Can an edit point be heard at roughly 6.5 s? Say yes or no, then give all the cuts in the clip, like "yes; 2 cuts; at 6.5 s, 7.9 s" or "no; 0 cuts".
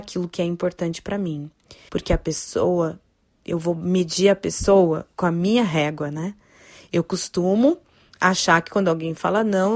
no; 1 cut; at 1.9 s